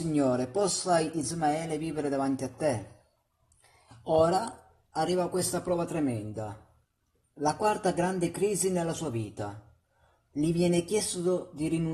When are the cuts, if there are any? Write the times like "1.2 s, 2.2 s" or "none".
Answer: none